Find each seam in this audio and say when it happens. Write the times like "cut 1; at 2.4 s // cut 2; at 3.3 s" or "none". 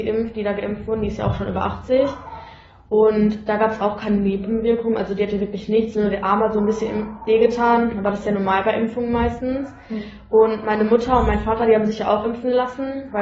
none